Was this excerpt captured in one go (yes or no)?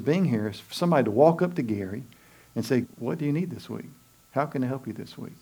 no